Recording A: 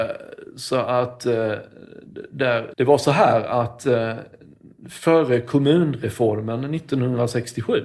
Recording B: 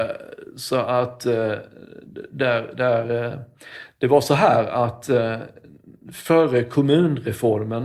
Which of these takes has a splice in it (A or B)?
A